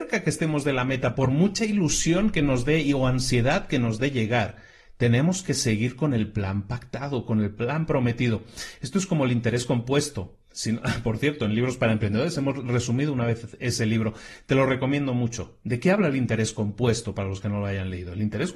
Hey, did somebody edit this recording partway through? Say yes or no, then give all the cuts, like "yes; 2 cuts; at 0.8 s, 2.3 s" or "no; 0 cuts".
no; 0 cuts